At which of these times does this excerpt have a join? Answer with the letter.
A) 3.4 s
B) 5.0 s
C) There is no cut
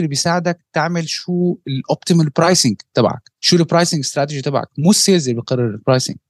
A